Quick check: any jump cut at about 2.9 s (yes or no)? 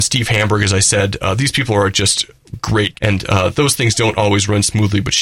yes